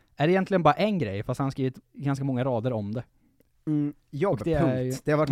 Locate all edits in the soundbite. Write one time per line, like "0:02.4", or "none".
0:01.8